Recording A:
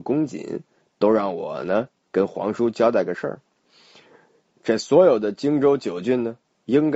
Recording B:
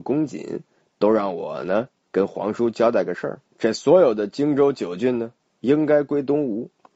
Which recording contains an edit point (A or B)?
B